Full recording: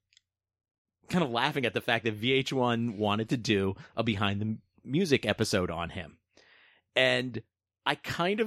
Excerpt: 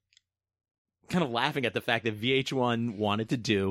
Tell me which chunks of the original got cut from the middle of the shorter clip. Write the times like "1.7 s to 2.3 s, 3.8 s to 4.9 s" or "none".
none